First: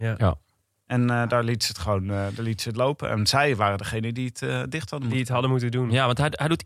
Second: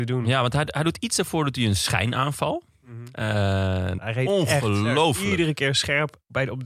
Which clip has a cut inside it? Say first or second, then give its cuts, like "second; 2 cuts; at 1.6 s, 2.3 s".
second; 1 cut; at 4.0 s